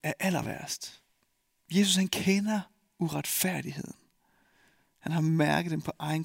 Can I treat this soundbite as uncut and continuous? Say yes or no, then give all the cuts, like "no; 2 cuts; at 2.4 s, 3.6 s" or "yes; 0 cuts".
no; 1 cut; at 1.6 s